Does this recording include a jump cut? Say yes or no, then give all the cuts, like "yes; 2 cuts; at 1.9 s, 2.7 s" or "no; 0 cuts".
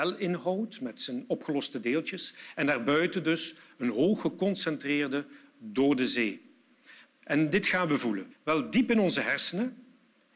yes; 2 cuts; at 7.1 s, 8.3 s